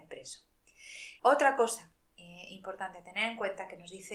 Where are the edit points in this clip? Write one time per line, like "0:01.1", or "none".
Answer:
0:01.2